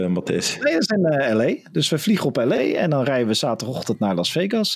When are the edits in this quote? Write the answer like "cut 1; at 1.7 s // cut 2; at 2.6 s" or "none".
cut 1; at 2.6 s